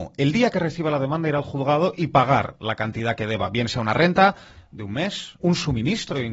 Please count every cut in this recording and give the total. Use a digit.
1